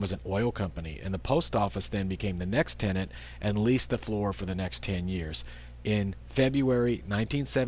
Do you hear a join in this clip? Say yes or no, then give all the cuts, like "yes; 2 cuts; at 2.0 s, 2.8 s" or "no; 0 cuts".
no; 0 cuts